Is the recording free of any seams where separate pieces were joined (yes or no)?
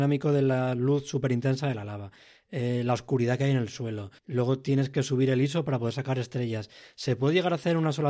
no